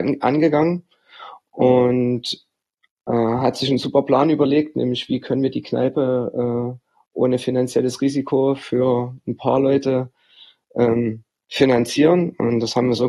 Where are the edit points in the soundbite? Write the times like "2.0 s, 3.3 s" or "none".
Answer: none